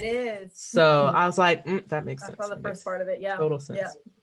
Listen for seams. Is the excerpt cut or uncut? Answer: uncut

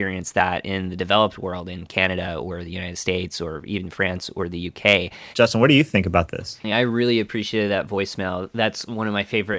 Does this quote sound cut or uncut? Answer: cut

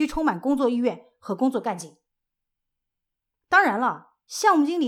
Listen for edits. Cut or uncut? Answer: uncut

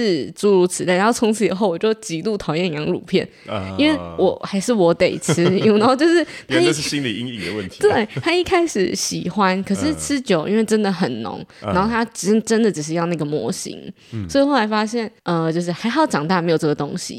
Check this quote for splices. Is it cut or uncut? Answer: cut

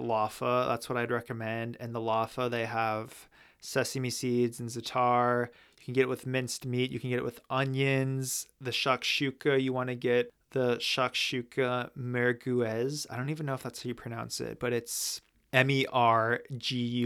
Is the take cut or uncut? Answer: uncut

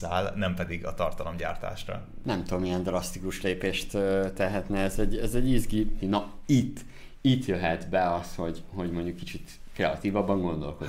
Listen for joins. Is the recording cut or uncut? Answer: cut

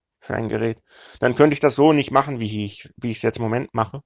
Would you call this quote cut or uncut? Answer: uncut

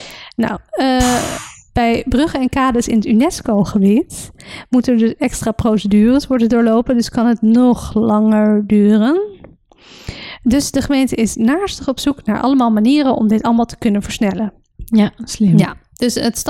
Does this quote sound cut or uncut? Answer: uncut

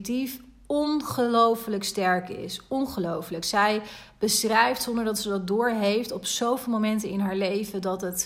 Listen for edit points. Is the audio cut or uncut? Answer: uncut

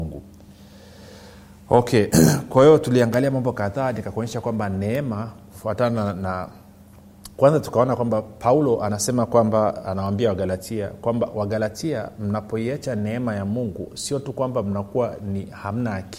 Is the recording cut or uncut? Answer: uncut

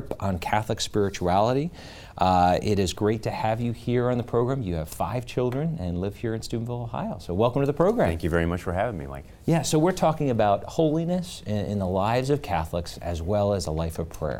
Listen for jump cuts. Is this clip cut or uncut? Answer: uncut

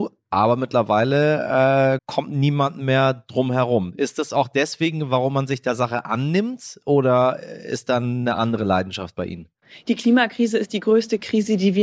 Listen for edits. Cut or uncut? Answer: cut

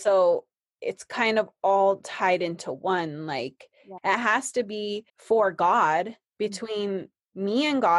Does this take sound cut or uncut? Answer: cut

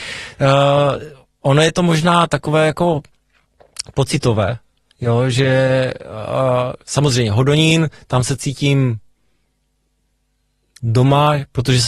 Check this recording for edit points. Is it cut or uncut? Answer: uncut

